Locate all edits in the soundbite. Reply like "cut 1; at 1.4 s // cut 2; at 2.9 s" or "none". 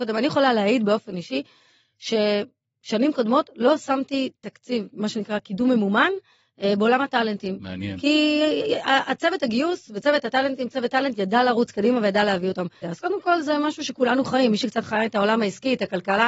cut 1; at 12.8 s